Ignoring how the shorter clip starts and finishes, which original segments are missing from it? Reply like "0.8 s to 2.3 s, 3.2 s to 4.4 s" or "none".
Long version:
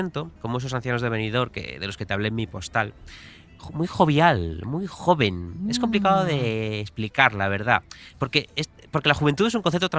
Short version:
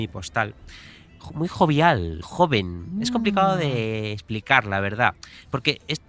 4.6 s to 4.9 s